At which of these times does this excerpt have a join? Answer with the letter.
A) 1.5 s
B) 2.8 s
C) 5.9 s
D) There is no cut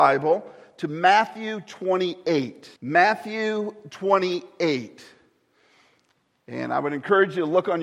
B